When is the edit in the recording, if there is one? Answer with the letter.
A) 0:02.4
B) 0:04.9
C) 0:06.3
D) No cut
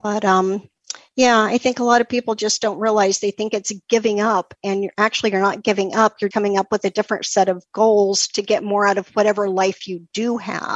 C